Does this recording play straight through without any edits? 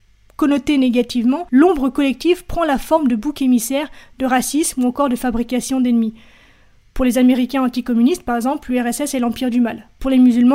yes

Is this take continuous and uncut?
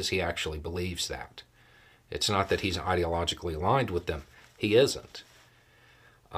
yes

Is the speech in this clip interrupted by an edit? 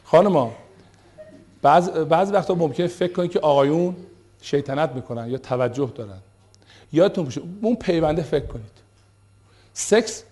no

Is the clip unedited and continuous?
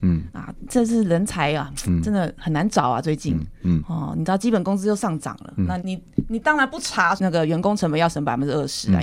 no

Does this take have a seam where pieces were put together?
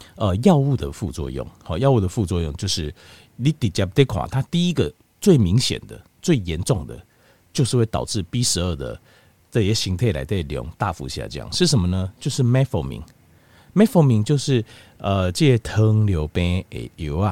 no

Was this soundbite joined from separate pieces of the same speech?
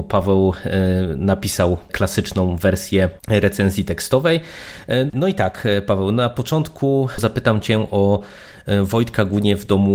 yes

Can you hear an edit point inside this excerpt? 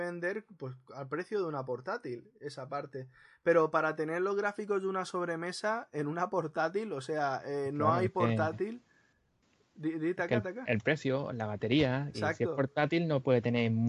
yes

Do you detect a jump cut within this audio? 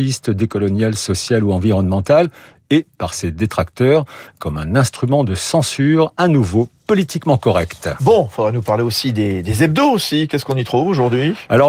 no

